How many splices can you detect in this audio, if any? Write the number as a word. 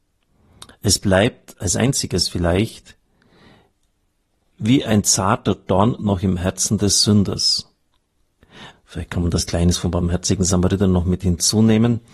one